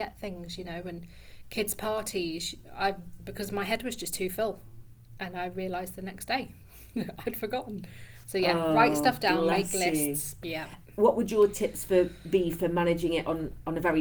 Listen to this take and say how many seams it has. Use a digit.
2